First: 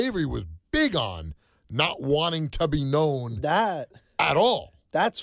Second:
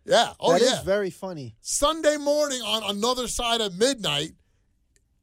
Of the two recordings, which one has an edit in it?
second; 1 cut; at 1.6 s

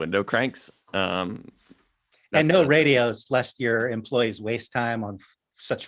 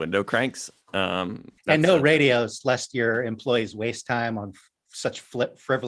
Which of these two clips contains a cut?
second; 1 cut; at 1.6 s

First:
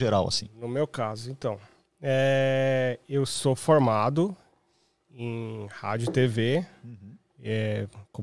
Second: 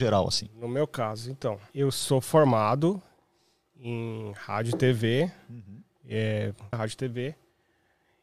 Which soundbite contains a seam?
second; 2 cuts; at 1.7 s, 6.7 s

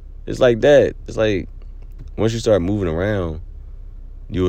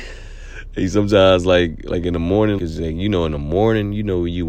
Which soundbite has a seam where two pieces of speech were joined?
second; 1 cut; at 2.6 s

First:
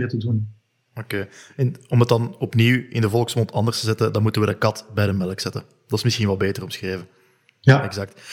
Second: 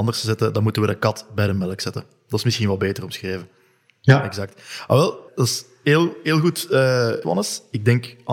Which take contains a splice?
second; 2 cuts; at 5.3 s, 7.2 s

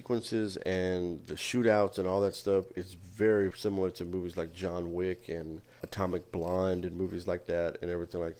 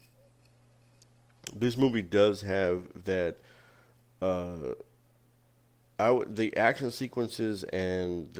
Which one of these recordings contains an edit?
first; 2 cuts; at 3.5 s, 5.8 s

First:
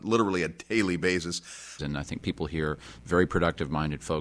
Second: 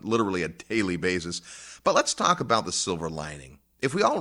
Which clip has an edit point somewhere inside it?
first; 1 cut; at 1.8 s

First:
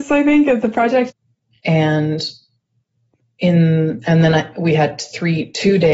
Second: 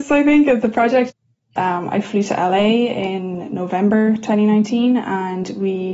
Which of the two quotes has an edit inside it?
second; 1 cut; at 1.6 s

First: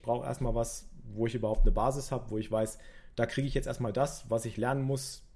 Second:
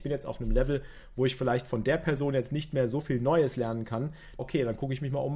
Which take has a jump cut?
second; 1 cut; at 4.4 s

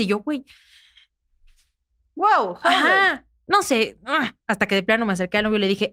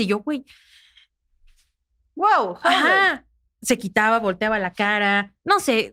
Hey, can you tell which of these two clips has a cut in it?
first; 1 cut; at 3.4 s

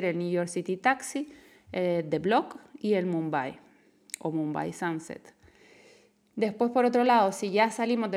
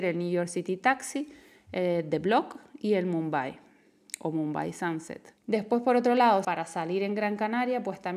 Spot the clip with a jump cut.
second; 2 cuts; at 5.4 s, 6.4 s

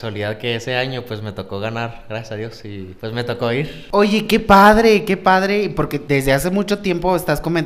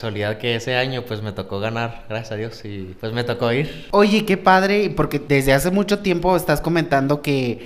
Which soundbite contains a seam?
second; 1 cut; at 4.3 s

